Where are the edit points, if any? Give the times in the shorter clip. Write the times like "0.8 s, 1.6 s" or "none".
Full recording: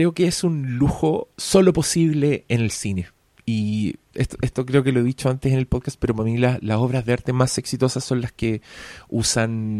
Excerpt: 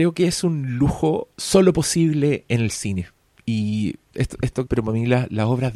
4.7 s